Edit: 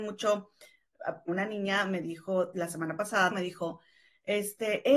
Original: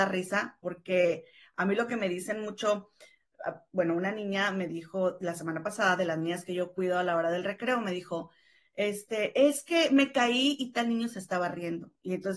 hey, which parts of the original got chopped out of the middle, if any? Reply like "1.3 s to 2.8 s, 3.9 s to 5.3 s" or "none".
3.7 s to 3.9 s, 6.0 s to 7.8 s